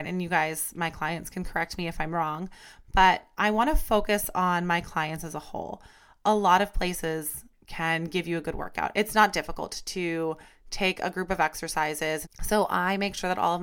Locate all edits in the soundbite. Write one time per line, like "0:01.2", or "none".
0:08.9
0:12.2